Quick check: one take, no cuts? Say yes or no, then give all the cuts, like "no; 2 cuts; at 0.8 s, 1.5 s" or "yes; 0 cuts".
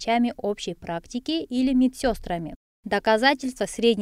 yes; 0 cuts